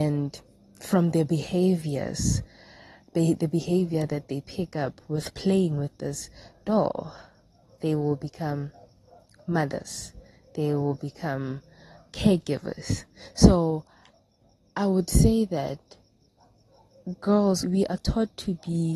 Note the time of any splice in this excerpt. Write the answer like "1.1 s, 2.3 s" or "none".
17.6 s